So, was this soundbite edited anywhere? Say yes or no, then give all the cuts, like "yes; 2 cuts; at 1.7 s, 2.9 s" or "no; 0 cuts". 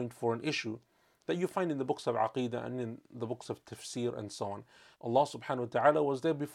yes; 1 cut; at 4.9 s